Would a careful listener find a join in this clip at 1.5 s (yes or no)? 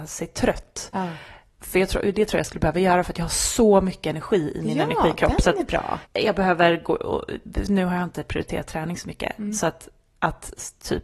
no